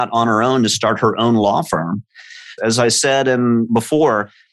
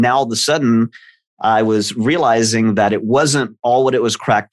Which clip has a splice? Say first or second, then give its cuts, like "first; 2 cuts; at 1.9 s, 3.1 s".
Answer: first; 1 cut; at 2.6 s